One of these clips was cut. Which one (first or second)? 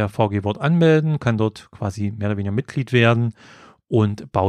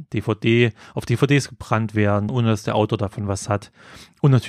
second